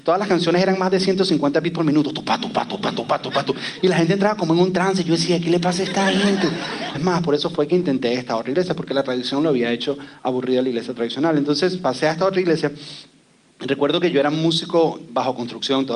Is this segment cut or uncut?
cut